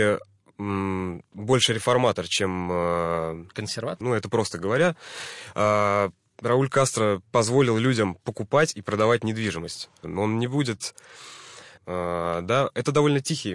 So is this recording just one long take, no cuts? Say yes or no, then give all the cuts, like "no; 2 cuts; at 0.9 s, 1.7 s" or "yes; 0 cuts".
no; 3 cuts; at 4.0 s, 10.0 s, 11.8 s